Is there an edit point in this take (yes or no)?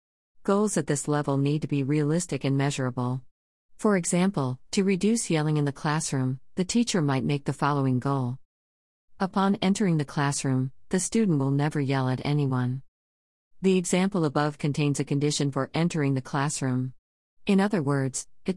no